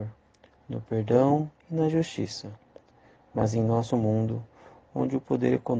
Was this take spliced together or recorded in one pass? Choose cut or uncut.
uncut